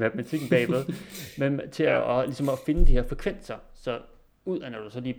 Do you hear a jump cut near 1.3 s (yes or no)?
no